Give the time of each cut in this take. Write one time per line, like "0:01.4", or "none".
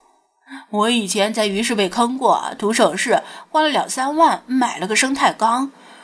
none